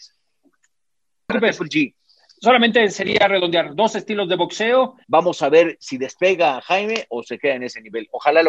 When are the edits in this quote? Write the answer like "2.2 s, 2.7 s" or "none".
1.3 s, 5.0 s, 7.1 s